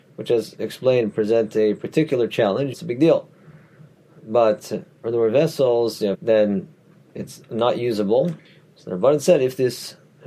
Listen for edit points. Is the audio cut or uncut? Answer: cut